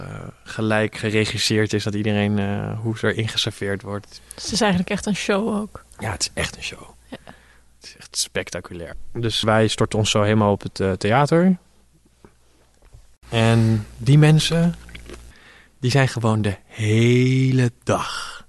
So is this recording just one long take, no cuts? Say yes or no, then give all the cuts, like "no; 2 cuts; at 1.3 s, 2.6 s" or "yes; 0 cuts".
no; 1 cut; at 9.4 s